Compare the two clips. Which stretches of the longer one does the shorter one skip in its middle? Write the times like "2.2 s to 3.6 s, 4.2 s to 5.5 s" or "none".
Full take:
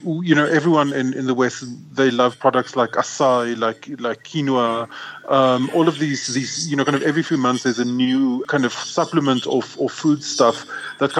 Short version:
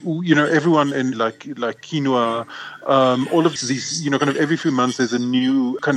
1.1 s to 3.6 s, 6.0 s to 6.2 s